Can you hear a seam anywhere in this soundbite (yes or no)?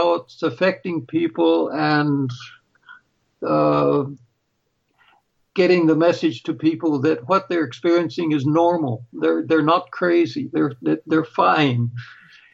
no